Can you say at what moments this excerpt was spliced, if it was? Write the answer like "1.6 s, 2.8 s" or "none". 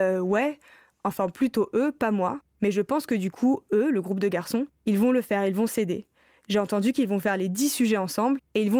none